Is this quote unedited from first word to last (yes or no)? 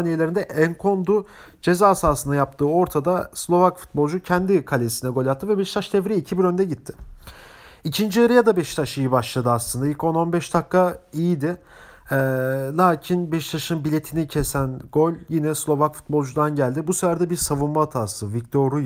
yes